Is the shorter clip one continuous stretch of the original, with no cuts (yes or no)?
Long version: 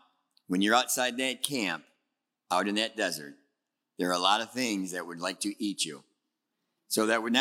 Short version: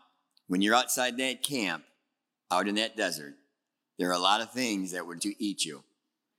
no